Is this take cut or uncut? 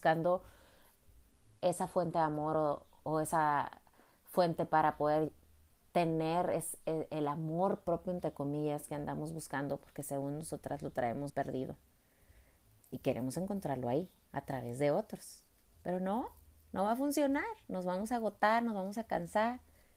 cut